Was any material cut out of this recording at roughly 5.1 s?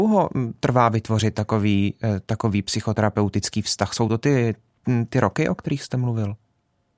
no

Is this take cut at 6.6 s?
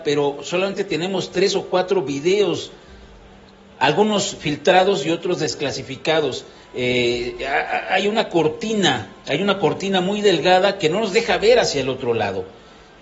yes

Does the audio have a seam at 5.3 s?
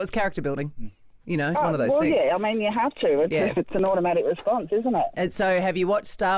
no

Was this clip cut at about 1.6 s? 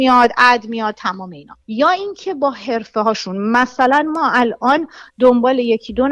yes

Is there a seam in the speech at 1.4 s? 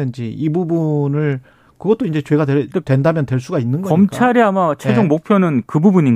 no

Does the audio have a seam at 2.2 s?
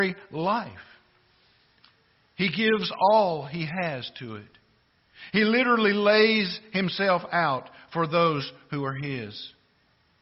no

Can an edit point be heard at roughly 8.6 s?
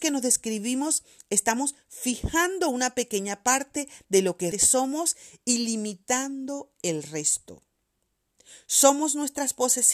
no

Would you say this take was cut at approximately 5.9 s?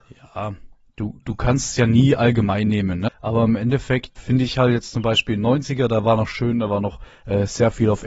no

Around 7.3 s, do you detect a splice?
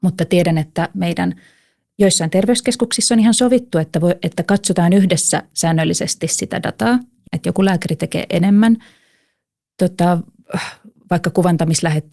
yes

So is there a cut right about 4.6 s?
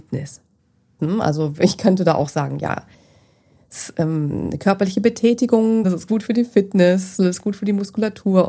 no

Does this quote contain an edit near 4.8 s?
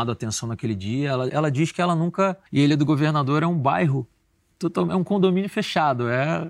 no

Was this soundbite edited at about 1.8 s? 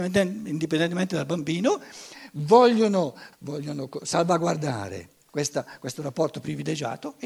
no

